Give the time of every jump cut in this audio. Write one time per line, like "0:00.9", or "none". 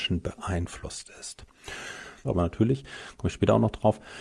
0:02.2